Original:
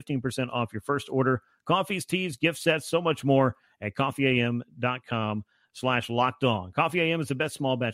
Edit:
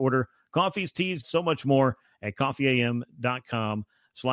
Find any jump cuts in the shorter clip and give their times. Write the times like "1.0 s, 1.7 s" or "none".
1.2 s

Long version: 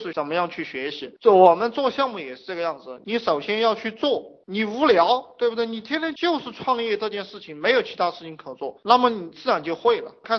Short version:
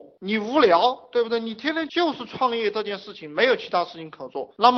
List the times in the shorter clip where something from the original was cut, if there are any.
none

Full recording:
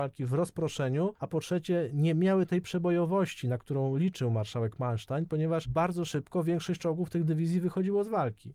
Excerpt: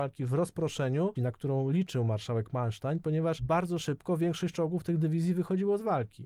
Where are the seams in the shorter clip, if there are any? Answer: 1.2 s

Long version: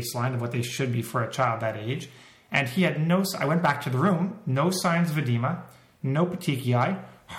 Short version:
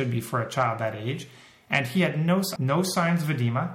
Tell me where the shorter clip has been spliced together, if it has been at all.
2.6 s

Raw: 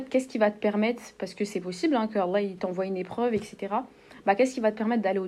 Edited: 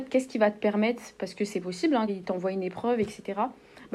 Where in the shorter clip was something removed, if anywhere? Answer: 2.1 s

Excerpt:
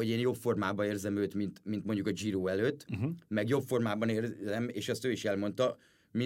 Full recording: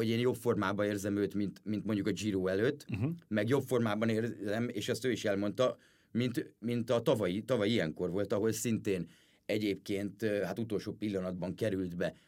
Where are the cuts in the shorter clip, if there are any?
none

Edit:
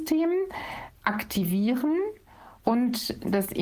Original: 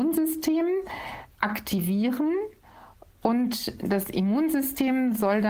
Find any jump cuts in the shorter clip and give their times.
2.6 s

